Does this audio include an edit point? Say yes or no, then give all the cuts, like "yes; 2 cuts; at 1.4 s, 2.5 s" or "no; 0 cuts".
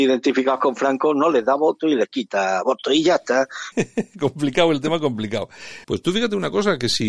yes; 2 cuts; at 3.7 s, 5.8 s